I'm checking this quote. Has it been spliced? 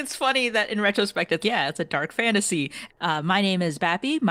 yes; 2 cuts; at 1.4 s, 2.9 s

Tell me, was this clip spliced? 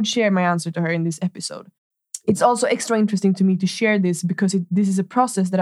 no; 0 cuts

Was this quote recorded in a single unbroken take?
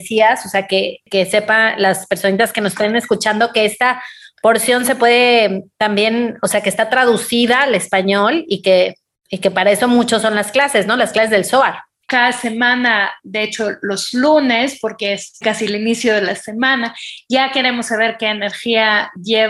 no; 2 cuts; at 12.0 s, 15.4 s

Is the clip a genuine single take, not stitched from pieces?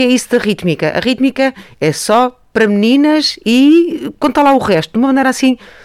yes; 0 cuts

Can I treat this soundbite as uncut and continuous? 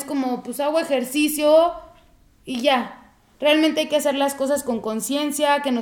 yes; 0 cuts

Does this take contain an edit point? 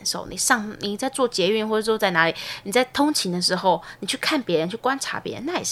no; 0 cuts

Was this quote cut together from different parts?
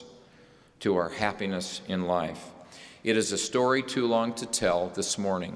no; 0 cuts

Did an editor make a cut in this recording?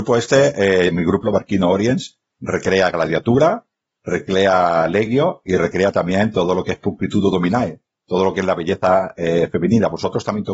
yes; 1 cut; at 1.2 s

